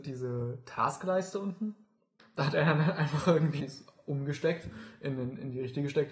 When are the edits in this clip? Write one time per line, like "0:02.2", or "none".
0:02.2
0:03.6